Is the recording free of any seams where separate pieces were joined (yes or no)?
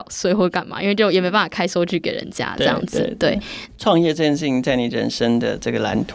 no